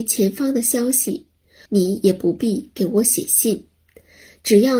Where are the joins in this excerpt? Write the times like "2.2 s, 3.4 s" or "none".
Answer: 1.7 s